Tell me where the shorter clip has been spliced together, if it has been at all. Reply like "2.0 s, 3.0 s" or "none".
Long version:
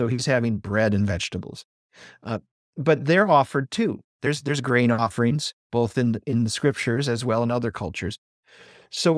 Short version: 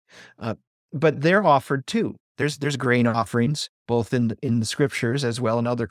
none